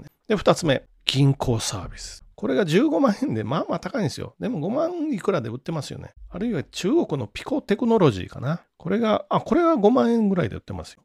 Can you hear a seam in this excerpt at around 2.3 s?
yes; 1 cut; at 2.3 s

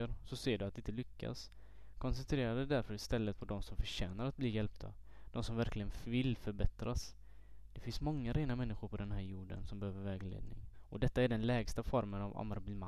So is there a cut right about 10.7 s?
yes; 1 cut; at 10.7 s

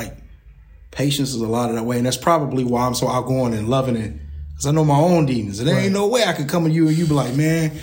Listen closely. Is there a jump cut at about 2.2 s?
no; 0 cuts

